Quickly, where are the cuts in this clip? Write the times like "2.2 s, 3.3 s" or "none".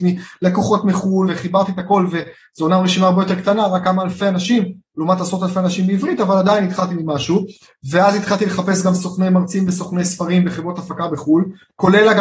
1.3 s